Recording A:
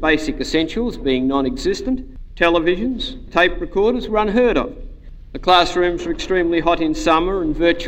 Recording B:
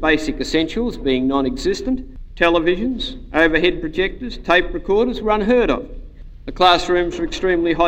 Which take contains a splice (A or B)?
A